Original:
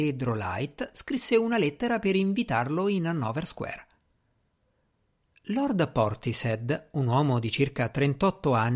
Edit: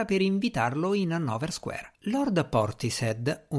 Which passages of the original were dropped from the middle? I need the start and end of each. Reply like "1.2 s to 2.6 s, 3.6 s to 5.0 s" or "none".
3.9 s to 5.4 s

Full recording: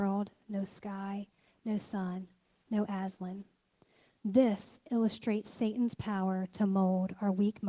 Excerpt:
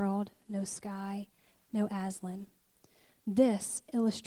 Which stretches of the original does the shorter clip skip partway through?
1.6 s to 2.6 s

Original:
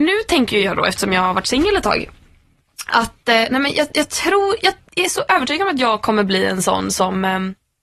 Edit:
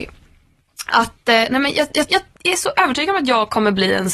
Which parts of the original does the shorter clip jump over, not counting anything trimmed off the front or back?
4.1 s to 4.6 s

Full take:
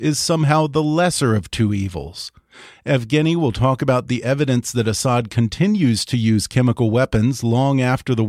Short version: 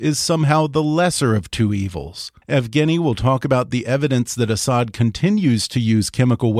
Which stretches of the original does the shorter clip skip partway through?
2.4 s to 2.8 s

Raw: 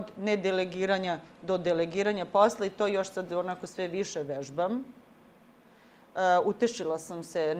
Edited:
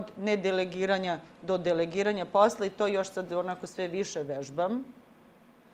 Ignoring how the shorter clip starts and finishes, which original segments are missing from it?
none

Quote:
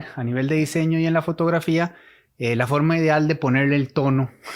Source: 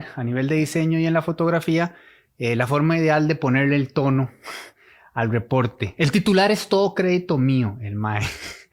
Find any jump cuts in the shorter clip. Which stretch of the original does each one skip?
none

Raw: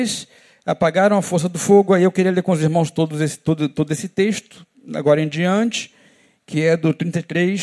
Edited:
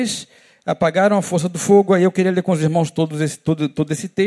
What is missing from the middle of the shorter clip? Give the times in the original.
none

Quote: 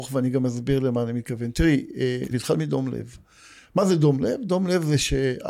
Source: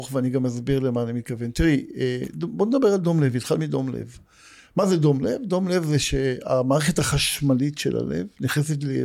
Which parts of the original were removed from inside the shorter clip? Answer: 2.3 s to 3.3 s

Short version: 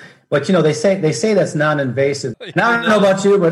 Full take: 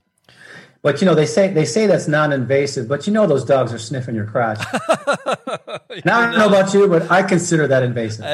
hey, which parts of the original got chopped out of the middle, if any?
2.9 s to 5.8 s

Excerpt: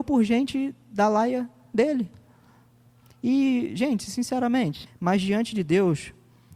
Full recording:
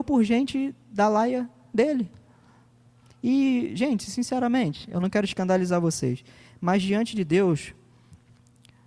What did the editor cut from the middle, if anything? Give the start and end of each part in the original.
4.9 s to 6.5 s

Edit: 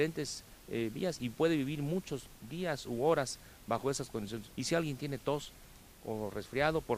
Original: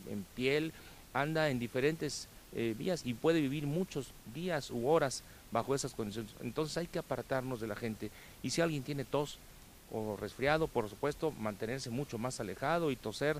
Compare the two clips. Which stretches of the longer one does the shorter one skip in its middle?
6.3 s to 8.4 s

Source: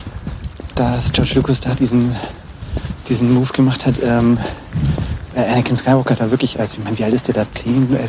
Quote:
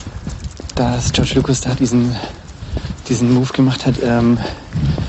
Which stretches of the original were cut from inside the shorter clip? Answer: none

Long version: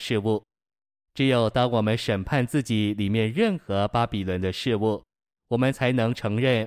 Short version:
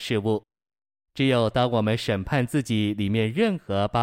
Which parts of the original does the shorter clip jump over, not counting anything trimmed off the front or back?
none

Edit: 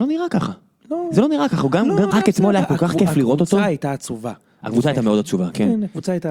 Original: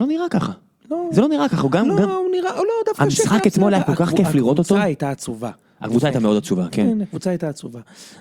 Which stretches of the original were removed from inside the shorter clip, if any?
2.1 s to 3.3 s

